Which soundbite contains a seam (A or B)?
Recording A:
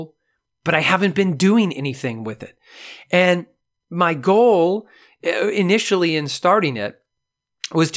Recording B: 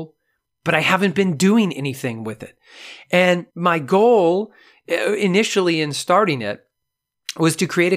B